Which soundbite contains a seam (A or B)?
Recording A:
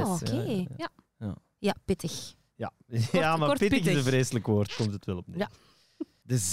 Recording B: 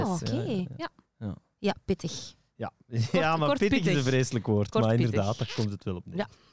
A